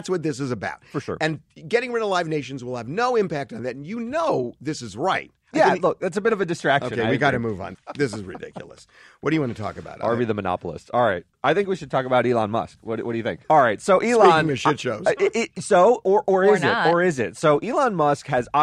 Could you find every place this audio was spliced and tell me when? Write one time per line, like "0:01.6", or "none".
0:07.7
0:13.4

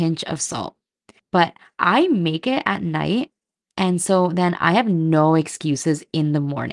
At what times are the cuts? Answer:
0:01.2

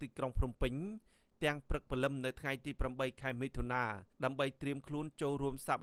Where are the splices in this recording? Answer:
0:04.1

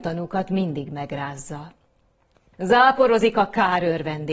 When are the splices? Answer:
0:02.5

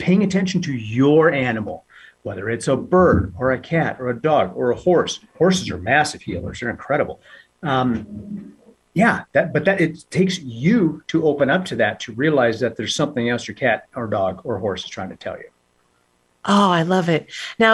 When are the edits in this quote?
none

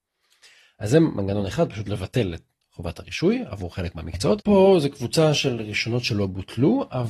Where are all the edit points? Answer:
0:04.4

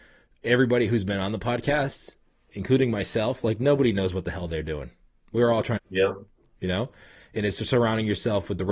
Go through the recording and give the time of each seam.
0:05.8

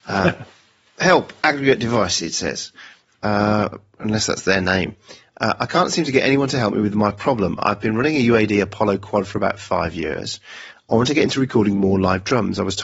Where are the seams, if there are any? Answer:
none

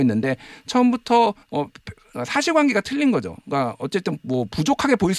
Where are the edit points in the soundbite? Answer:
0:01.4

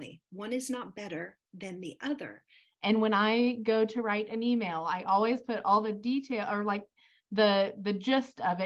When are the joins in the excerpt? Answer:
0:02.6

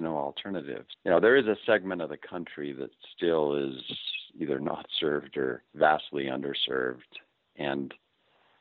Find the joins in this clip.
0:00.9
0:05.7

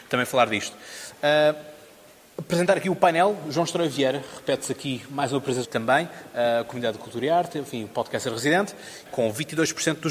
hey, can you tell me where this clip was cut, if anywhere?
0:05.6
0:09.1

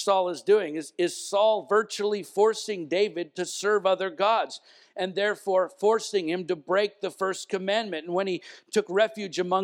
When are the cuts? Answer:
none

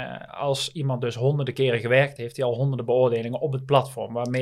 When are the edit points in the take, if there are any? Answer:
0:02.2

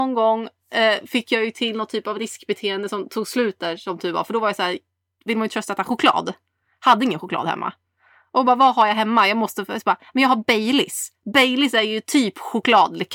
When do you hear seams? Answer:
none

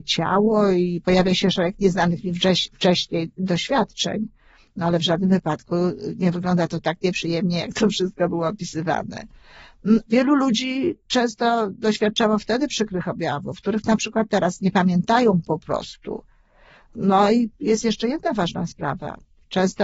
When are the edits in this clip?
0:10.0

